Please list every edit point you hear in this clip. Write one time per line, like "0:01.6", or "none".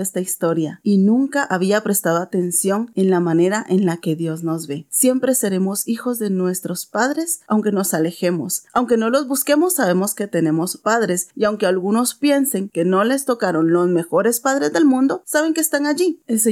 0:04.9